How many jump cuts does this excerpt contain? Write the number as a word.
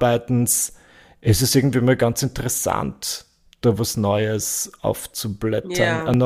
zero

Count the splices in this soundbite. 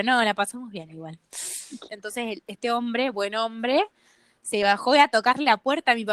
one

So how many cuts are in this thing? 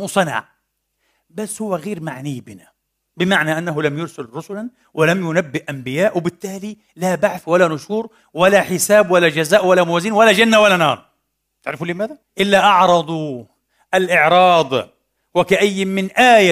one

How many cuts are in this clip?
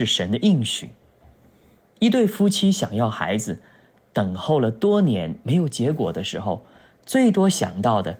zero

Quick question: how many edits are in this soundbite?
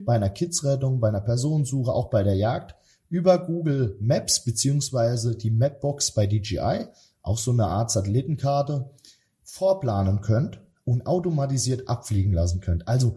zero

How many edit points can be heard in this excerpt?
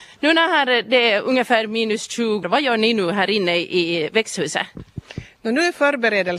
one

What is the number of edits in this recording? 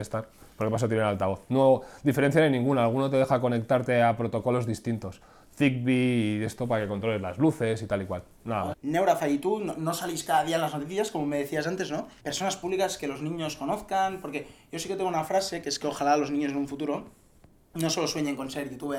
two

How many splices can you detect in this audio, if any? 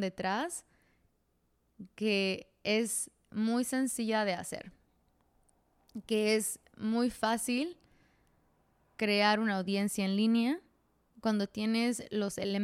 zero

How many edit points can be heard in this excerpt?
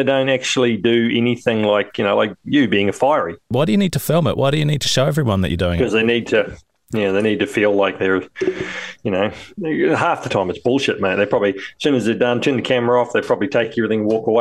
one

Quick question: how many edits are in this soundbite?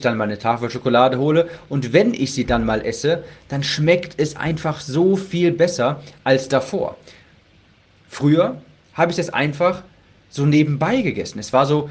zero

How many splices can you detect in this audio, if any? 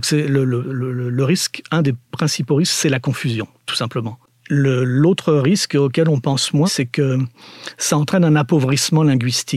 one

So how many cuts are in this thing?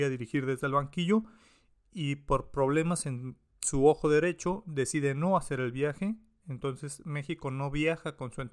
zero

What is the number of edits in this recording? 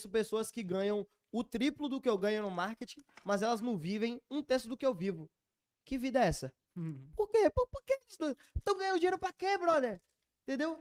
zero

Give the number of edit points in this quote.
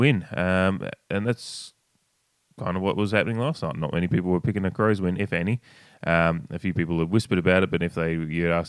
zero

